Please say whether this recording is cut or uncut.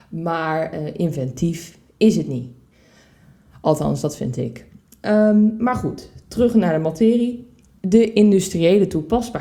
uncut